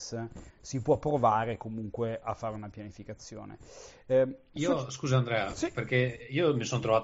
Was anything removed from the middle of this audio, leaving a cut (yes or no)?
no